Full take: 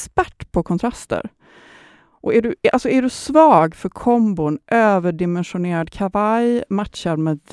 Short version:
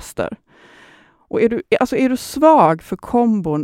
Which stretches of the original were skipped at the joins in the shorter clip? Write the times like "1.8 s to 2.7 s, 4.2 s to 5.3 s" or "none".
none